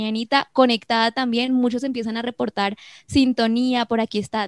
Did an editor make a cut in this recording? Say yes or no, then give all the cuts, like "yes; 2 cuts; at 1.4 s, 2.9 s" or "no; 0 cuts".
no; 0 cuts